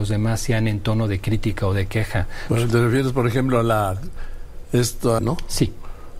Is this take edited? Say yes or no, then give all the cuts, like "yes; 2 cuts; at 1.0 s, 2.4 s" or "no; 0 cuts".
yes; 2 cuts; at 2.5 s, 5.2 s